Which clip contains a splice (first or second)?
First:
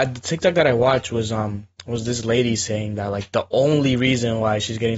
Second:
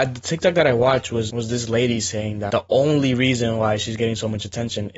second